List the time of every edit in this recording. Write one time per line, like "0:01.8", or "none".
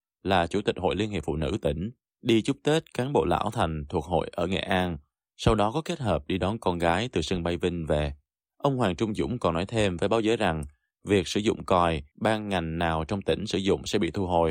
0:12.1